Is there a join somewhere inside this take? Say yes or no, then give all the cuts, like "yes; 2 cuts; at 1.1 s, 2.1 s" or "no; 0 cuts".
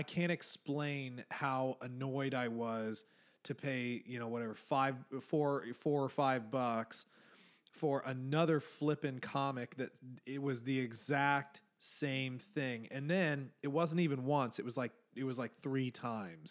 no; 0 cuts